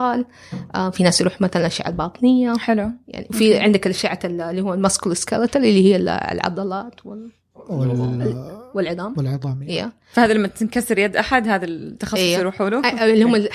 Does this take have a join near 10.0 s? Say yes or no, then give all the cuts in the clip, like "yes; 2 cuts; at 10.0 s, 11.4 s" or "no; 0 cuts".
no; 0 cuts